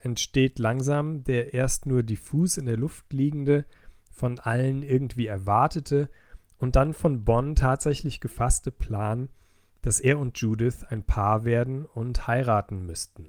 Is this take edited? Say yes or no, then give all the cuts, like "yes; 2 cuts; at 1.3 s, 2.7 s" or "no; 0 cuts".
no; 0 cuts